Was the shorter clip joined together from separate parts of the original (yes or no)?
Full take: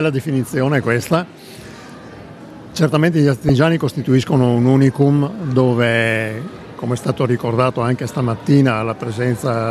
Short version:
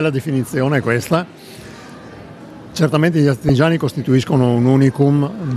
no